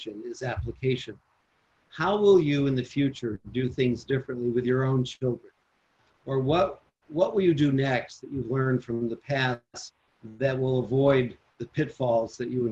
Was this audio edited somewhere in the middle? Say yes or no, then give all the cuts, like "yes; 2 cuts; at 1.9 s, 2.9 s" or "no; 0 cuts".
no; 0 cuts